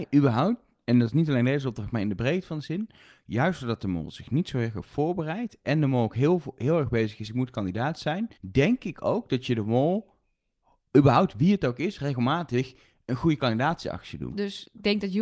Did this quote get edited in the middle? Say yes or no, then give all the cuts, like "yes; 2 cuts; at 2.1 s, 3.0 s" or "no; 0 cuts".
yes; 2 cuts; at 8.3 s, 14.3 s